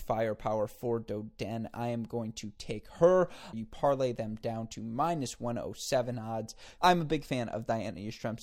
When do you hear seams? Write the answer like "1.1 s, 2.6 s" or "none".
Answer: 3.5 s, 6.8 s